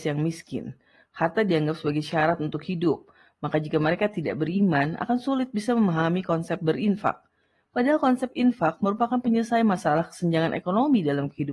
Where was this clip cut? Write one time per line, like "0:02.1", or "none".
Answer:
none